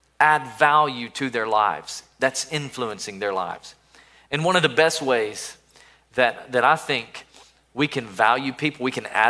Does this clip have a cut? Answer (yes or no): no